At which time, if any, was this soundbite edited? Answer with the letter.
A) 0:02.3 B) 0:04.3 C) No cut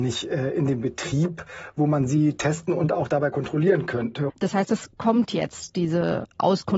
B